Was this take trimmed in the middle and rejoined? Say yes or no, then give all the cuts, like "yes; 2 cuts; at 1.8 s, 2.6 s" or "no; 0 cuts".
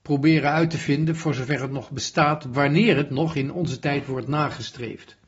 yes; 1 cut; at 2.5 s